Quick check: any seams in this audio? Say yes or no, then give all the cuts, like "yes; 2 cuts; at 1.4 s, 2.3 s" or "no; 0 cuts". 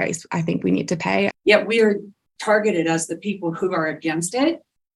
yes; 1 cut; at 1.3 s